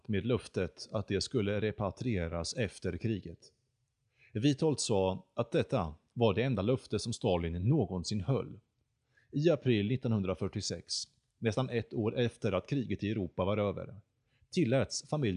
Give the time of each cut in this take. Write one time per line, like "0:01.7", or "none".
none

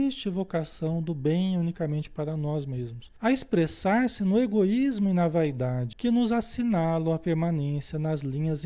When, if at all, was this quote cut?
0:03.2
0:05.9

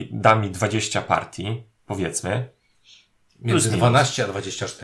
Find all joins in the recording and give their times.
none

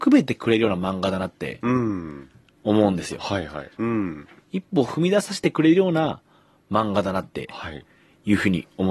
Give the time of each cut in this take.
0:03.8

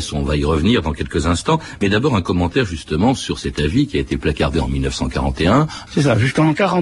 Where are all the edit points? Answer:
0:05.9

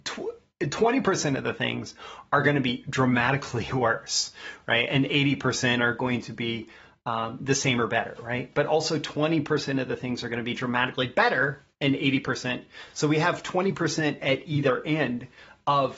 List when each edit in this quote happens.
none

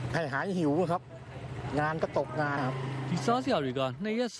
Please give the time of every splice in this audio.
0:02.6

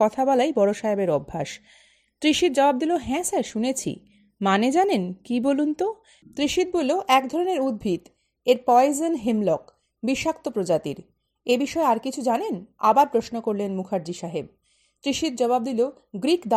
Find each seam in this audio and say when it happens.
none

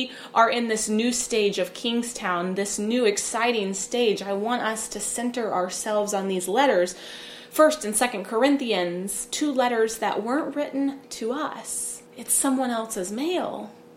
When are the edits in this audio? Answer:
0:12.1

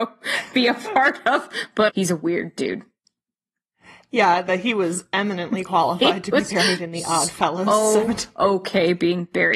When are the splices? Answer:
0:01.9

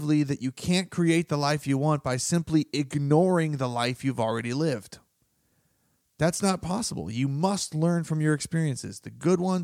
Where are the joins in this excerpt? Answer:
none

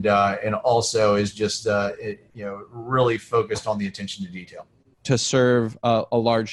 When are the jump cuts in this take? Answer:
0:04.9

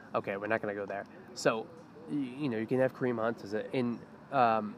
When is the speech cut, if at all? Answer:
0:03.7

